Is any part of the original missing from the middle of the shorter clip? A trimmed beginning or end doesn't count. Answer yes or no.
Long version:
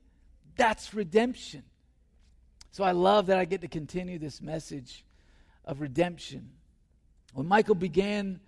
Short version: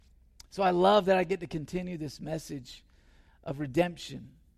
no